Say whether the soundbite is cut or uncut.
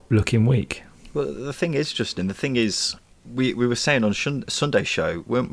uncut